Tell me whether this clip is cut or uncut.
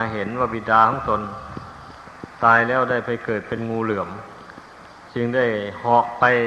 uncut